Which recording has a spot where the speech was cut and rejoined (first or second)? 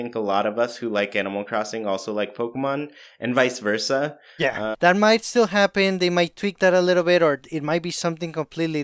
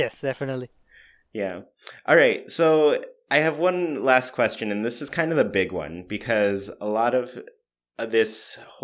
first